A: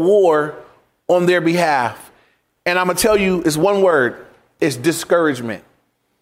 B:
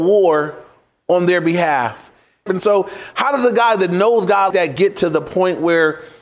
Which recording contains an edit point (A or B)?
B